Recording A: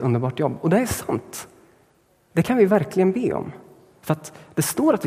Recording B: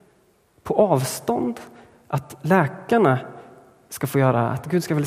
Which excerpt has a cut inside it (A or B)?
A